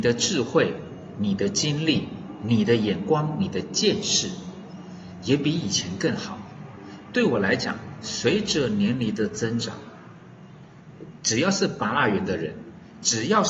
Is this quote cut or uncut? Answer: uncut